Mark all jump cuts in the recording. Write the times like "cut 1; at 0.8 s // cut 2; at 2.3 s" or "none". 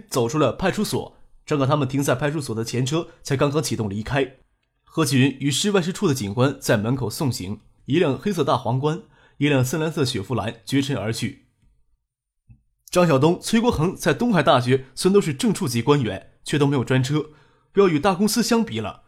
cut 1; at 7.8 s